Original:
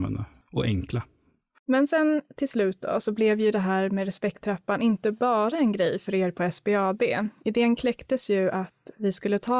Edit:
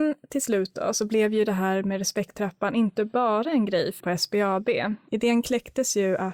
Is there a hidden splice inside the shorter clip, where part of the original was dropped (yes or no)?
yes